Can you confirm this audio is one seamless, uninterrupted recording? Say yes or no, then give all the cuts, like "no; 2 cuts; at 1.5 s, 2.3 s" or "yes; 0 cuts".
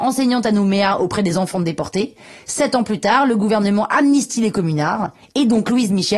yes; 0 cuts